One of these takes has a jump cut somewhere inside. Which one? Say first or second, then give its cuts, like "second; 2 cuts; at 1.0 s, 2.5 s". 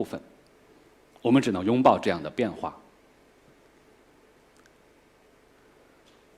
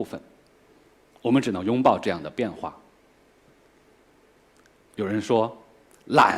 second; 1 cut; at 4.8 s